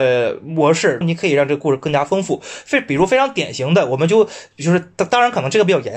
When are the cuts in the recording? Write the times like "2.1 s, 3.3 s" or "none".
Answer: 1.0 s